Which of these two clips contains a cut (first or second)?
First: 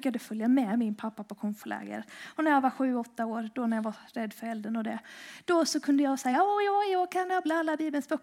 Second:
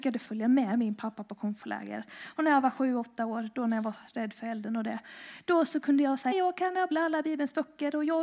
second